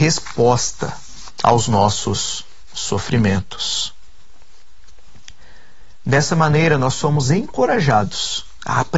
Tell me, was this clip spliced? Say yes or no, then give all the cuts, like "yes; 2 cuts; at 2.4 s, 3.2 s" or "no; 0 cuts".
no; 0 cuts